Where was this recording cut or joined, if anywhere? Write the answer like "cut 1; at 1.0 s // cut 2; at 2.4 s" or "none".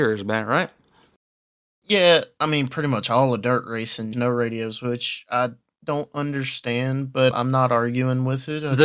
cut 1; at 4.1 s // cut 2; at 7.3 s

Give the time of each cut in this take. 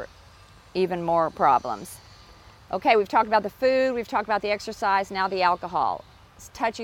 none

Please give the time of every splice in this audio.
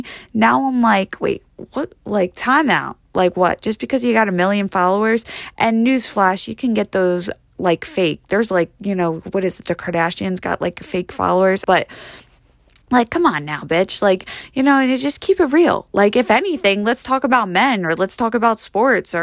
cut 1; at 11.6 s

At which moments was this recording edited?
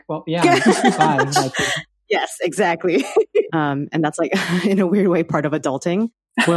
cut 1; at 3.5 s

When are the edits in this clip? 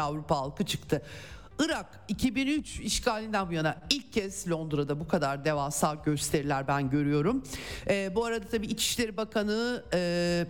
none

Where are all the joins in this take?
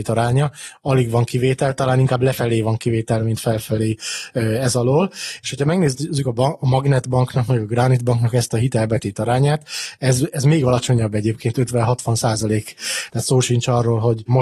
cut 1; at 13.1 s

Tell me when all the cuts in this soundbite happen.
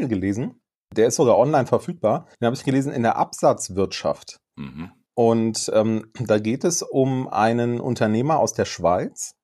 cut 1; at 2.3 s

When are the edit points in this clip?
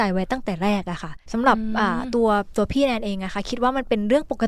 cut 1; at 1.2 s

